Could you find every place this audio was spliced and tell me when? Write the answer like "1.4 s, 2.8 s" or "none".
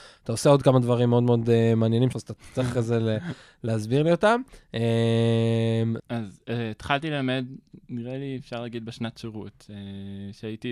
2.1 s, 6.0 s

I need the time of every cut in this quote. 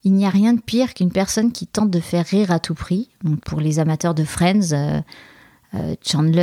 3.4 s

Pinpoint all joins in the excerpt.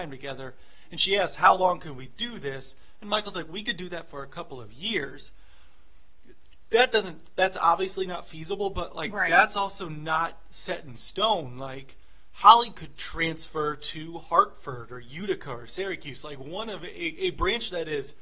none

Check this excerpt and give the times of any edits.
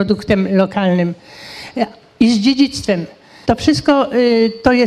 3.4 s

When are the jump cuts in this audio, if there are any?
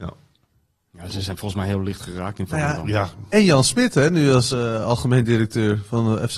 none

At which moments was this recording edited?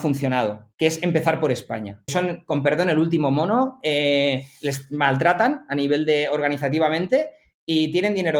2.1 s

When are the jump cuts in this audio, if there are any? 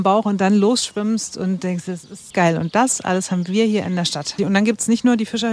2.3 s, 4.4 s

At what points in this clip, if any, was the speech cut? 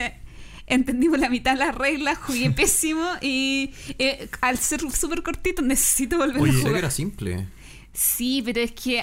6.7 s

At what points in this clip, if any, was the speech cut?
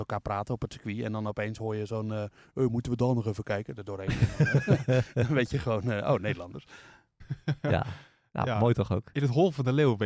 none

